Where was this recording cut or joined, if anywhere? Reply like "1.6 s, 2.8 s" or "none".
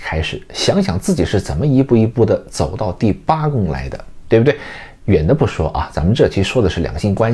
none